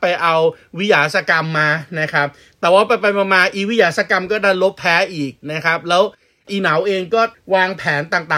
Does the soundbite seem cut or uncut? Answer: uncut